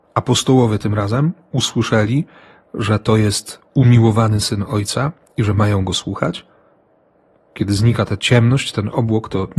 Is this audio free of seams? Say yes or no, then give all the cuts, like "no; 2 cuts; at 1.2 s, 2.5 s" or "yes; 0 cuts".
yes; 0 cuts